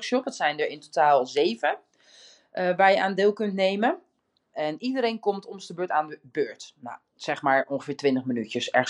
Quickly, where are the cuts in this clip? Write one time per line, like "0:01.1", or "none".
0:04.5